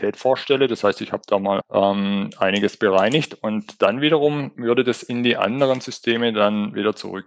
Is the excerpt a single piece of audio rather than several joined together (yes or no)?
no